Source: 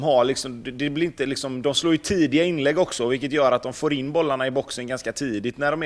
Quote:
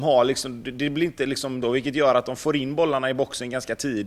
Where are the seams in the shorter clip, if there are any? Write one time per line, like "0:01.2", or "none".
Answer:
0:01.6